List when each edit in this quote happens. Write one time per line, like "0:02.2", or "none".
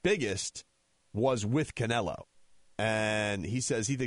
0:02.6